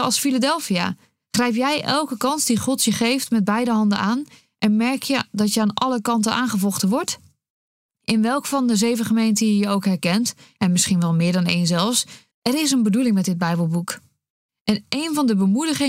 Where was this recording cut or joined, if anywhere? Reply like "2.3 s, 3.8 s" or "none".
12.3 s, 14.5 s